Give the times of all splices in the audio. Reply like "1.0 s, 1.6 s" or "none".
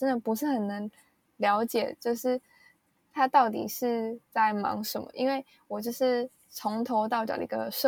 none